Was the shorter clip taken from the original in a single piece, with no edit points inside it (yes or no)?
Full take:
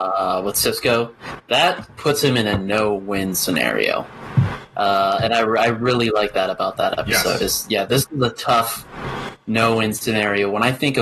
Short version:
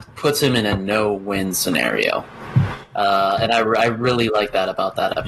yes